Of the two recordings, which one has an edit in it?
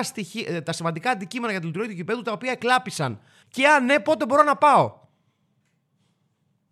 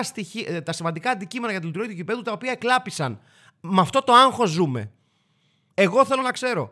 first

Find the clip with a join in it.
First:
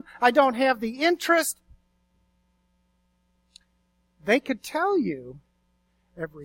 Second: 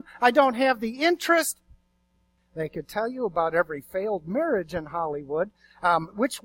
second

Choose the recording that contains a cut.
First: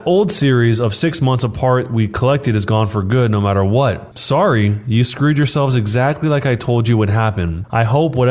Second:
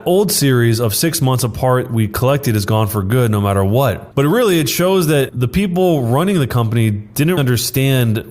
second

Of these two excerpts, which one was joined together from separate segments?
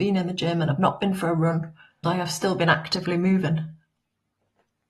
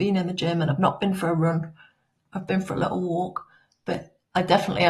first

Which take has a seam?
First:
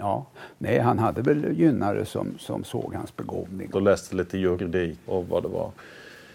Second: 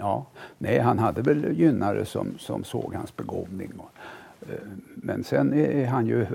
first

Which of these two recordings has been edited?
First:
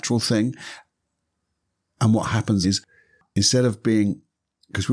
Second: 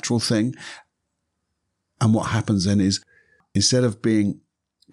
first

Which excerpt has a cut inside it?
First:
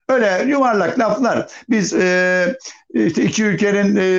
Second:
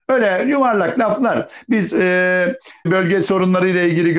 second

